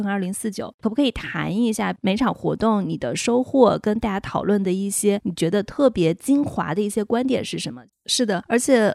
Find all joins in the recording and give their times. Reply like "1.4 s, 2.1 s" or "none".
7.9 s